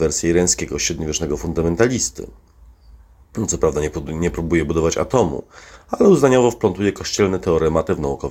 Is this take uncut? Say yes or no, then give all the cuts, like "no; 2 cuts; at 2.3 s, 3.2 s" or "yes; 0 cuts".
yes; 0 cuts